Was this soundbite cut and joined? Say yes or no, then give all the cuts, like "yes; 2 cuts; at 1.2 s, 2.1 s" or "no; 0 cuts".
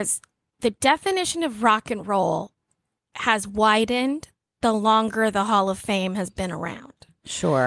no; 0 cuts